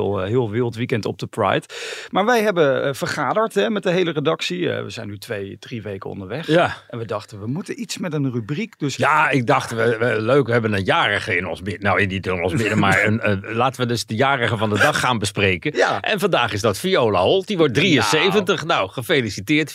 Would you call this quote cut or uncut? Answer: uncut